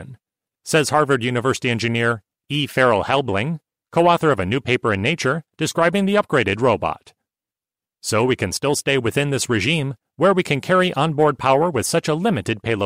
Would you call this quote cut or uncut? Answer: uncut